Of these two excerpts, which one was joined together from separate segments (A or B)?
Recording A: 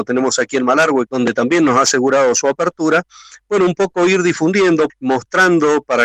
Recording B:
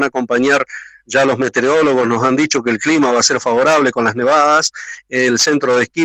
A